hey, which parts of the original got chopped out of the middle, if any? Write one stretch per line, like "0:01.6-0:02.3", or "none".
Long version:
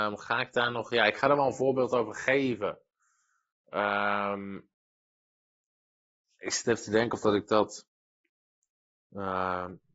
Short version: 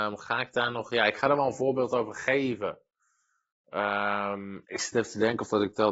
0:04.6-0:06.4